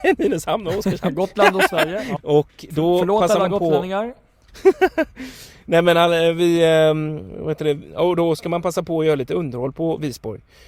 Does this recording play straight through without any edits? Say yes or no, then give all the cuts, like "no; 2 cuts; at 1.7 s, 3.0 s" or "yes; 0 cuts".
no; 1 cut; at 2.2 s